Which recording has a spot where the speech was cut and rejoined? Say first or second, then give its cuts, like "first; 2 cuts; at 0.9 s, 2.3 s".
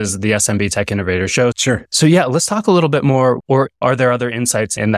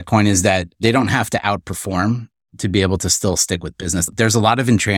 first; 2 cuts; at 1.5 s, 3.4 s